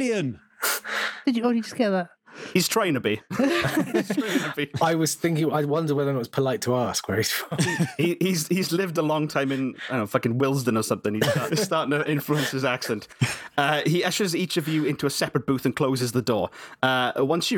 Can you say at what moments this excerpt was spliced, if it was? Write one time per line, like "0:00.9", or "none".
0:11.5

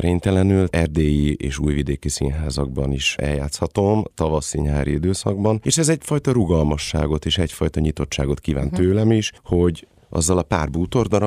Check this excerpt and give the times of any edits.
none

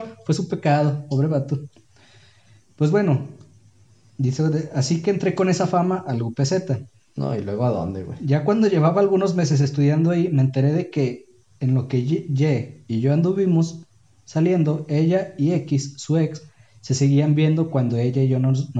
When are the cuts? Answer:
none

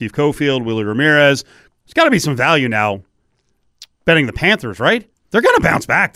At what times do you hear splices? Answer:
0:01.7

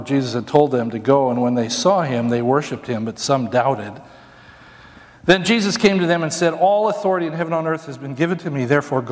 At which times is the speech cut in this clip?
none

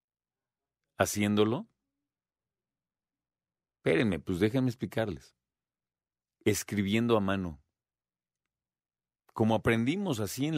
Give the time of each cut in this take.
none

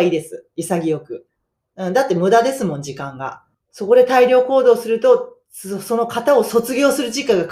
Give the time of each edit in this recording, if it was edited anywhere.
0:03.5

